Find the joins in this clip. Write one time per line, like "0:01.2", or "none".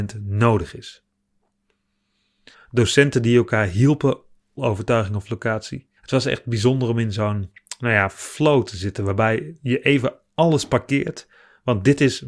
0:02.5
0:04.6
0:06.0